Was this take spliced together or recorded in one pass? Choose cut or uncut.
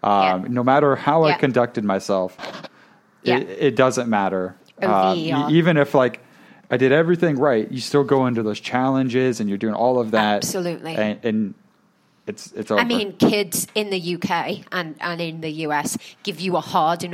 uncut